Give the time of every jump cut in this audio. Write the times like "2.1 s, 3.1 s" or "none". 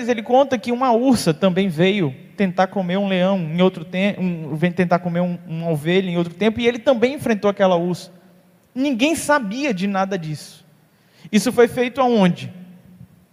none